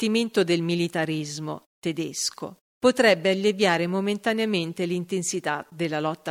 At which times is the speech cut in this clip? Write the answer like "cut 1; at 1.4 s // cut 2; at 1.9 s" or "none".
cut 1; at 2.7 s